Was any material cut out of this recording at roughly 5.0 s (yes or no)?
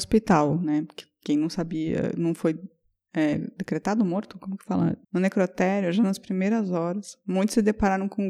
yes